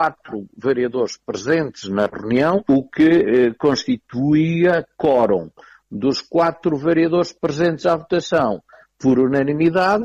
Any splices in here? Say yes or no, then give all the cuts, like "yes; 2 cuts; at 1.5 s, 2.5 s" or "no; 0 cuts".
no; 0 cuts